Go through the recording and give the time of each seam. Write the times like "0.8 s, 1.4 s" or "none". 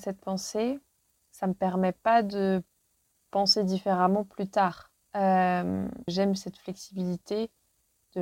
6.1 s